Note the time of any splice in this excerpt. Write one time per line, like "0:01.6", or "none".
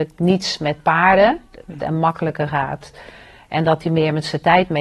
0:01.8